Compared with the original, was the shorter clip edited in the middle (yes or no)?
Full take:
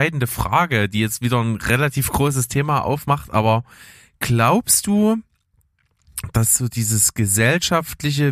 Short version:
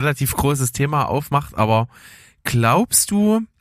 no